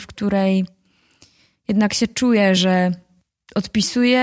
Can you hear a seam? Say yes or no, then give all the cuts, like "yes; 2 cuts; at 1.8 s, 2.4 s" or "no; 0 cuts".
no; 0 cuts